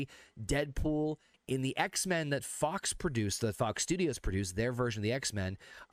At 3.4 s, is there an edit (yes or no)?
no